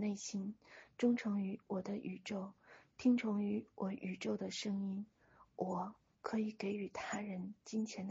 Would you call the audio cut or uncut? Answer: uncut